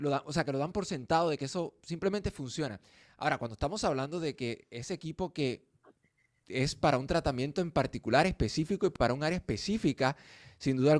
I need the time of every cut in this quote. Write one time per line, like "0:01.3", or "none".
none